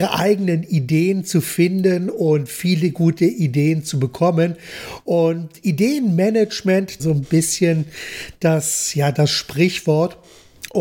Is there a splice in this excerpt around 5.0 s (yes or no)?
no